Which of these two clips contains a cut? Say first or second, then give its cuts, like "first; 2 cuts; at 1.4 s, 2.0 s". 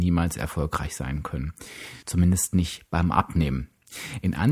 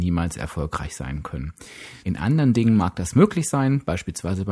second; 1 cut; at 2.0 s